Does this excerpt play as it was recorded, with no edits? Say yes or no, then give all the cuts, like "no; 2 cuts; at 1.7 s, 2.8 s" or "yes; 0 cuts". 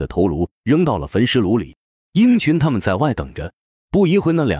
yes; 0 cuts